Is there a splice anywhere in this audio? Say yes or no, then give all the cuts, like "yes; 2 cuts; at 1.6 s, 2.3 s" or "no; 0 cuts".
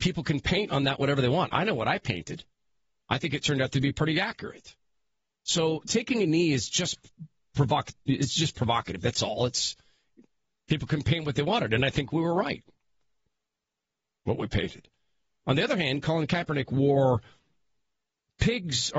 no; 0 cuts